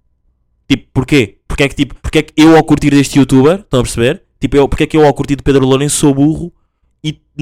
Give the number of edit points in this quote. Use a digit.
1